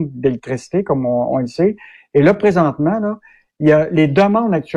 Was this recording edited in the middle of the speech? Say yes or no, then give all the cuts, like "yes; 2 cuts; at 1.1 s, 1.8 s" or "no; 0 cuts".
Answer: no; 0 cuts